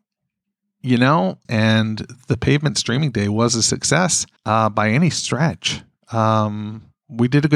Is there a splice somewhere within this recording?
yes; 2 cuts; at 1.4 s, 4.4 s

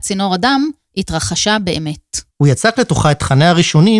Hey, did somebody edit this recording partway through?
yes; 1 cut; at 2.3 s

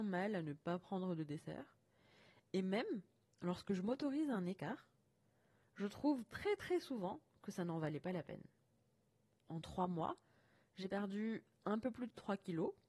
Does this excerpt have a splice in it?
no; 0 cuts

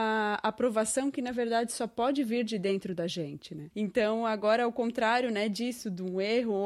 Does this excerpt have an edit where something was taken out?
yes; 1 cut; at 3.7 s

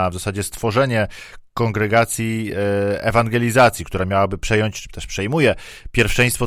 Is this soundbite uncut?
yes; 0 cuts

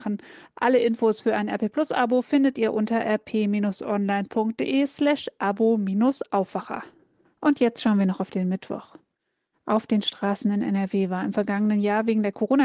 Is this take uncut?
yes; 0 cuts

